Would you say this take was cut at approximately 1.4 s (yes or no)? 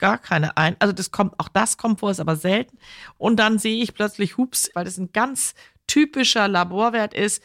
no